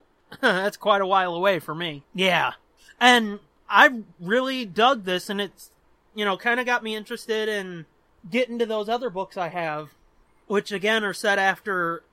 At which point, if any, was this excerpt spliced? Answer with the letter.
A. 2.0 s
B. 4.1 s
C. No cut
A